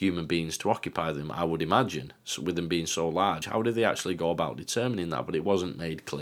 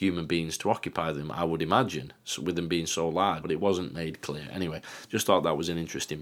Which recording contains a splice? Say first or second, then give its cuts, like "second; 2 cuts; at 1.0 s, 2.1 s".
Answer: second; 1 cut; at 3.4 s